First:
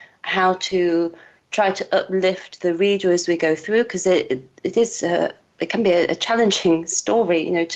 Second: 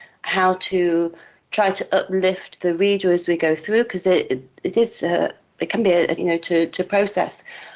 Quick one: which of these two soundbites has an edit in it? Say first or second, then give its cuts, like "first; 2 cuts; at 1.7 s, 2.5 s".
second; 1 cut; at 6.2 s